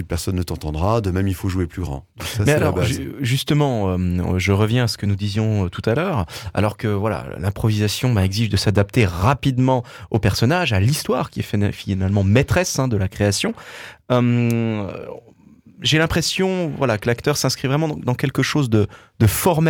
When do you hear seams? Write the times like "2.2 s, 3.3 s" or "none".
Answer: none